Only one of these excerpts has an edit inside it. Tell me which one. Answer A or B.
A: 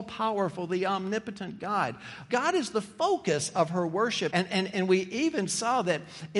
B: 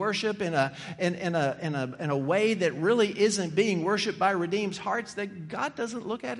A